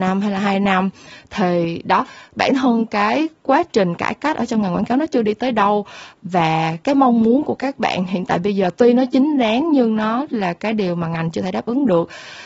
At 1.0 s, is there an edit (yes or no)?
no